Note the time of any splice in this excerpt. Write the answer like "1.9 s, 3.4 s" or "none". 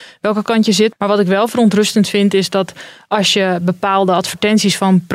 0.9 s